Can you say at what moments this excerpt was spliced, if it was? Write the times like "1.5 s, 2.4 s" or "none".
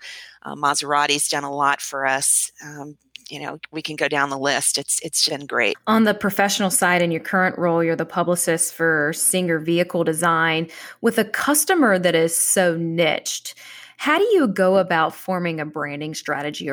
5.3 s

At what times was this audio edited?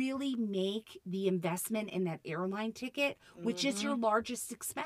none

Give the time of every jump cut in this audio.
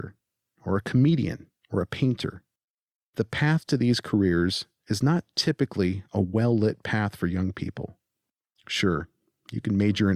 none

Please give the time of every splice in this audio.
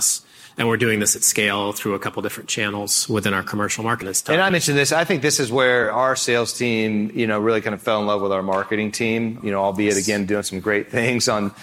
4.0 s

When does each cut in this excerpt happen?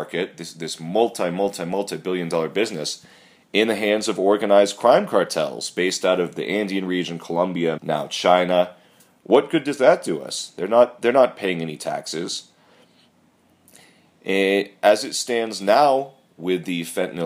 7.8 s

